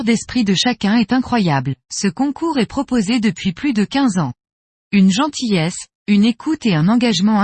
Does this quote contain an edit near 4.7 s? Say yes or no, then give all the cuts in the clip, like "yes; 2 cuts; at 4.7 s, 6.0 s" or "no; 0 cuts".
yes; 2 cuts; at 1.8 s, 4.7 s